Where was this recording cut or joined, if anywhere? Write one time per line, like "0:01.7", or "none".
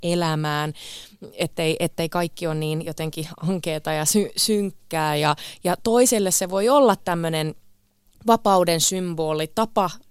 none